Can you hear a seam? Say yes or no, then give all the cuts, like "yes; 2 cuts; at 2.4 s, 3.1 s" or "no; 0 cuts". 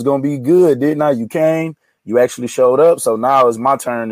no; 0 cuts